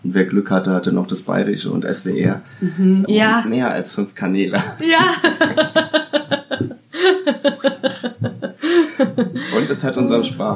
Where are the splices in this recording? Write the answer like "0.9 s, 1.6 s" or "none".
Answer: 3.1 s